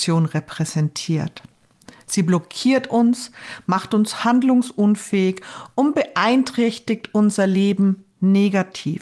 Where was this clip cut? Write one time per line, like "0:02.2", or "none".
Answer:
none